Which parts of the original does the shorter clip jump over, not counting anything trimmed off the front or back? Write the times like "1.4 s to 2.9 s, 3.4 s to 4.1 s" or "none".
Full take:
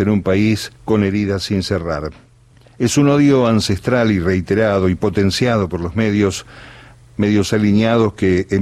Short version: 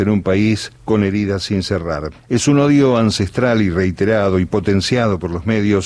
2.2 s to 2.7 s